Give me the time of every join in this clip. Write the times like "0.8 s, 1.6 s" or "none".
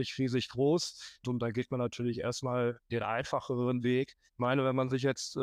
1.2 s, 2.9 s, 4.3 s